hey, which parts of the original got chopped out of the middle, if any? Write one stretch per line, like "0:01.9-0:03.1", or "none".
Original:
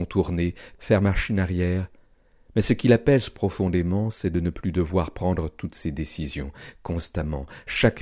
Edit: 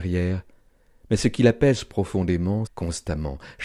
0:04.1-0:06.7